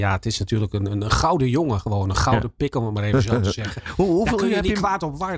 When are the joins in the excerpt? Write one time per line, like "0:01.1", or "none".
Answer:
none